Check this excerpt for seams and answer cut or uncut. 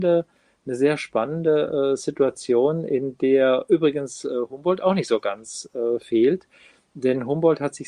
uncut